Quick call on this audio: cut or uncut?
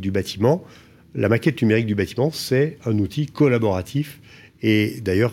uncut